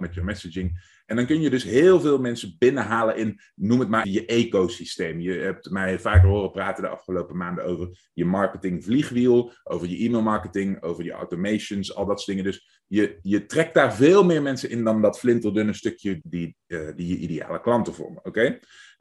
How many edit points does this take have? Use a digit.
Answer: 2